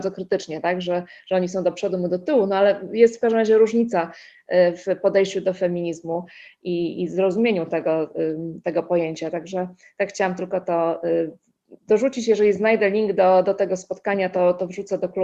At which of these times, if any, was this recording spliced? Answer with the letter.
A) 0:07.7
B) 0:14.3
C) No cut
C